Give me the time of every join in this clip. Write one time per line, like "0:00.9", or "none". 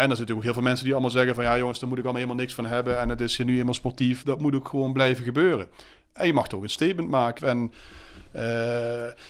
0:04.2
0:07.4